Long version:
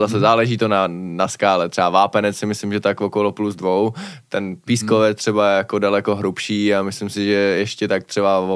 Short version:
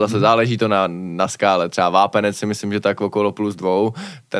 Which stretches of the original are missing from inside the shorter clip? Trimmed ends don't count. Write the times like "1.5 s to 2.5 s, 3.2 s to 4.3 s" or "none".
none